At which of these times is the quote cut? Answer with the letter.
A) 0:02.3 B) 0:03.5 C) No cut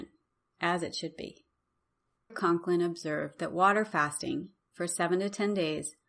A